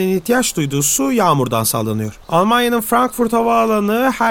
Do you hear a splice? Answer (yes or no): yes